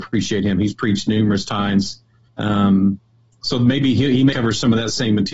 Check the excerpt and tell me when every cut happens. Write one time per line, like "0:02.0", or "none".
0:02.3
0:04.3